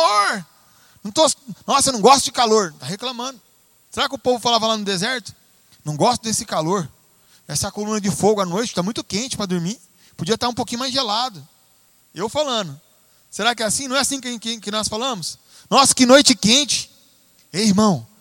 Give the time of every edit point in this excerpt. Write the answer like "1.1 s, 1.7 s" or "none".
none